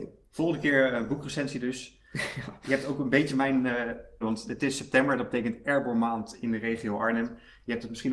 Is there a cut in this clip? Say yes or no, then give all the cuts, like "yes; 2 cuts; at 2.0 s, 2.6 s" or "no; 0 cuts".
yes; 1 cut; at 4.2 s